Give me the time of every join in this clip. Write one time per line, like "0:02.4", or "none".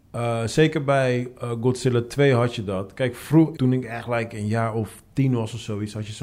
0:03.5